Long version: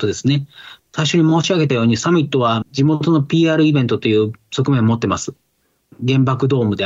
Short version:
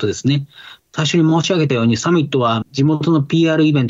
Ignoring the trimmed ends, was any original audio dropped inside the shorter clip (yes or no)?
no